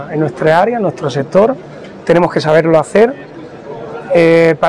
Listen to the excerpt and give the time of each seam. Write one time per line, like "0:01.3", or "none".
none